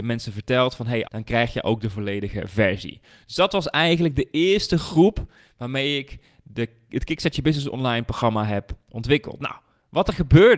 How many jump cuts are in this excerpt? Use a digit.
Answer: 1